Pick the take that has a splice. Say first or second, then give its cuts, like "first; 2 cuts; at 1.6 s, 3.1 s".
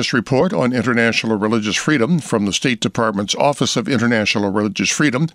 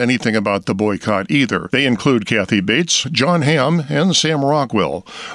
second; 1 cut; at 3.0 s